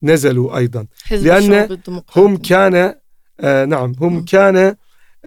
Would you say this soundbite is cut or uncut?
uncut